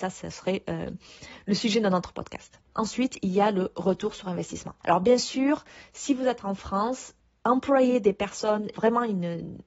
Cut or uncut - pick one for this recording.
cut